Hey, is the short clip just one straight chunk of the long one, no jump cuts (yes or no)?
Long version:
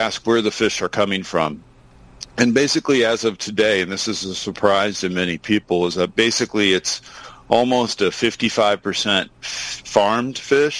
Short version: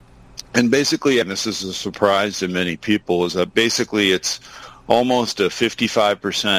no